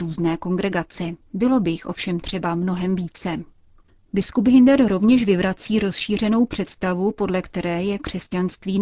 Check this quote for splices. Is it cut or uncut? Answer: uncut